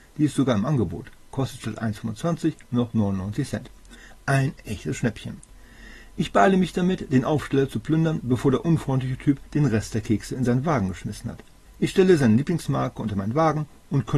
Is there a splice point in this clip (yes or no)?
yes